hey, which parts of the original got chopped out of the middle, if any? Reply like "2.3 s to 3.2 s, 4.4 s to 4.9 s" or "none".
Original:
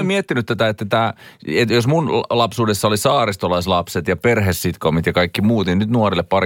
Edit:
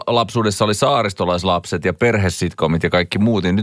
none